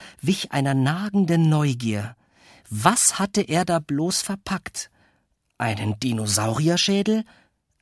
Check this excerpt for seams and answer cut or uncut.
uncut